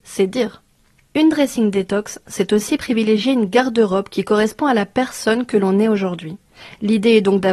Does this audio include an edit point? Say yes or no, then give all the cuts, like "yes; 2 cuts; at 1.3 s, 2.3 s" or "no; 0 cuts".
no; 0 cuts